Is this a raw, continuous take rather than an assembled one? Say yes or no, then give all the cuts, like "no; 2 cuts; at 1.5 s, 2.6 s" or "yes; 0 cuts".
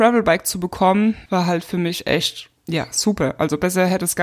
no; 2 cuts; at 1.3 s, 2.6 s